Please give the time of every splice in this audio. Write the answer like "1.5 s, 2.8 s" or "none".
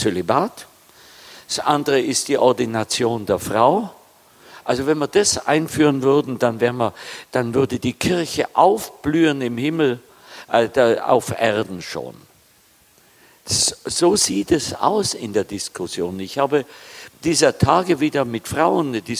none